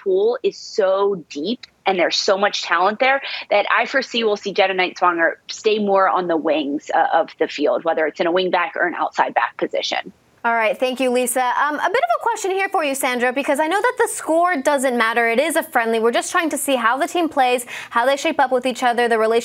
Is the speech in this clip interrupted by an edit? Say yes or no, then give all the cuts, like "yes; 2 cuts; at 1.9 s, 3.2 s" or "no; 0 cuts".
no; 0 cuts